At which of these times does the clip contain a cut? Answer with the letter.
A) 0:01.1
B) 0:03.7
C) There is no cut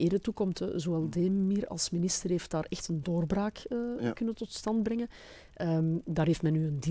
C